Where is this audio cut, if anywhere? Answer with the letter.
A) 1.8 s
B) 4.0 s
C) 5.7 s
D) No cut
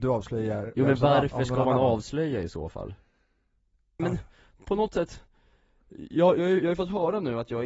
B